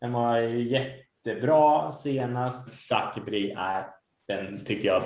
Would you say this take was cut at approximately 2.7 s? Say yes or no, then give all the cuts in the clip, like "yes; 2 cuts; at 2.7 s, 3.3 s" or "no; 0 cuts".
yes; 1 cut; at 2.7 s